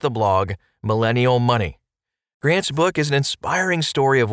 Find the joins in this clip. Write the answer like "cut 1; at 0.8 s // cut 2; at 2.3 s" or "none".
none